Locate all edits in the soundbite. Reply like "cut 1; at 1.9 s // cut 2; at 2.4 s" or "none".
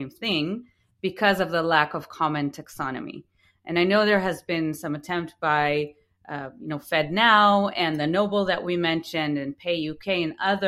none

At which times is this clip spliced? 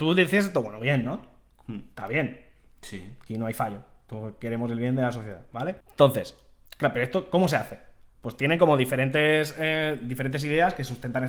cut 1; at 5.8 s

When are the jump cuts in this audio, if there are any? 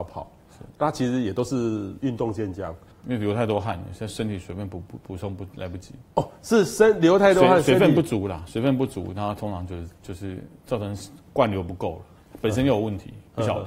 cut 1; at 2.9 s

